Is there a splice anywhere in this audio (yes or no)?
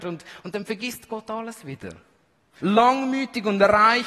yes